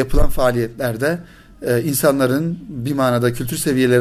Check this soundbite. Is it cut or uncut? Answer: uncut